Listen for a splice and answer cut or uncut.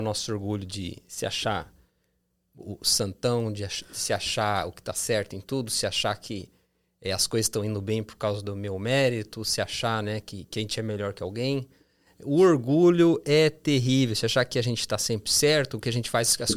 uncut